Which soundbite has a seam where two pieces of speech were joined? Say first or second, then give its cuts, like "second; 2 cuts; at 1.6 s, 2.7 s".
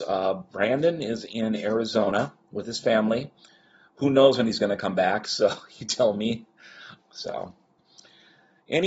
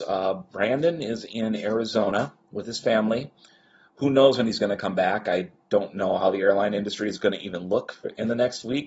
first; 2 cuts; at 5.2 s, 7.0 s